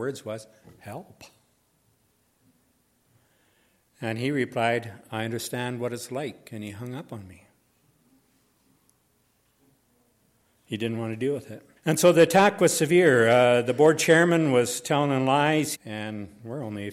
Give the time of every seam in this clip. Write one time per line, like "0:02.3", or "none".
0:11.8
0:15.7